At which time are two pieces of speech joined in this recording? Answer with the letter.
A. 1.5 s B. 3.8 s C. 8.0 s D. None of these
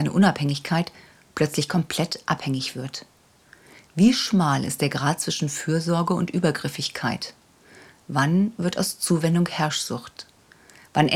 D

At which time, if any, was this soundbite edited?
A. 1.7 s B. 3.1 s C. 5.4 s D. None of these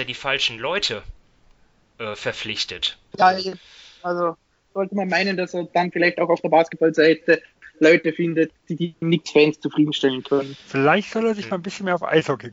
B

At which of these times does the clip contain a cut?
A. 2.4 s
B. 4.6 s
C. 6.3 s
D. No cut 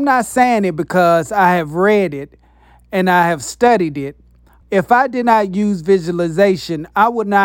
B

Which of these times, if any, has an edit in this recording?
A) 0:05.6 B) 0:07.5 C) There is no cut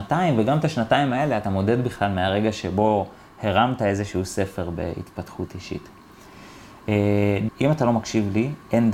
B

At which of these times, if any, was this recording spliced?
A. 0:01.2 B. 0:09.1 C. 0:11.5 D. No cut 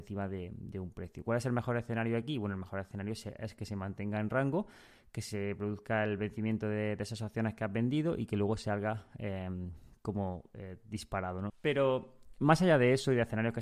C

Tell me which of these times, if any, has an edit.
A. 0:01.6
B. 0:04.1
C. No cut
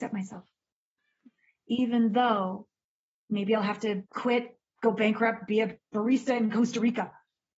B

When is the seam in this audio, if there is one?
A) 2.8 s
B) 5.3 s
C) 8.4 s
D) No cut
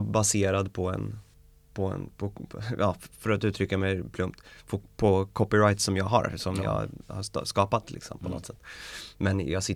D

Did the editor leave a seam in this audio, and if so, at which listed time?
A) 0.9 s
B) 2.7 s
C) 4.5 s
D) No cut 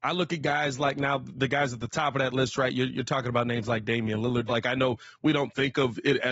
C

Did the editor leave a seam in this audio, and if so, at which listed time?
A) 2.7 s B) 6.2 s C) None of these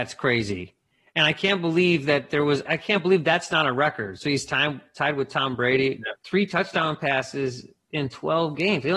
A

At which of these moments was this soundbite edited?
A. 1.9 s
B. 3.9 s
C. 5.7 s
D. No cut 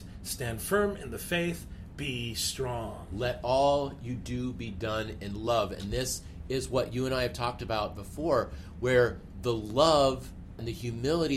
A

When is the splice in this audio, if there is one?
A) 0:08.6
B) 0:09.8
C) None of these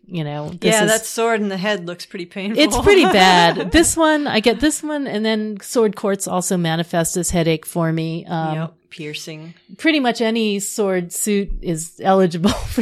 C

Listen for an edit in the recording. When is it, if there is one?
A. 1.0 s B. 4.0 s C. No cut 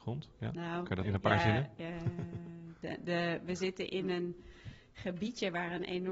A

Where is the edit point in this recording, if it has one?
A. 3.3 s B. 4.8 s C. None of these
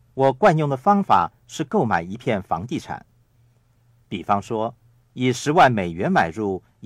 C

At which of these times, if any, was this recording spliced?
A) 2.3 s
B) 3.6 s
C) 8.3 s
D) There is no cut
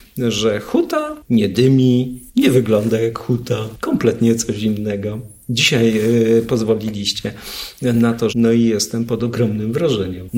C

